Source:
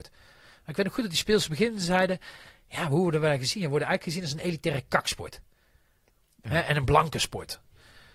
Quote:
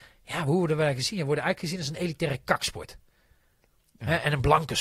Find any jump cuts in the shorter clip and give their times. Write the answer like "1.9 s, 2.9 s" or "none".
none